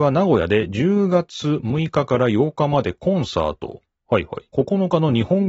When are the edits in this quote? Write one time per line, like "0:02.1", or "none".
0:04.5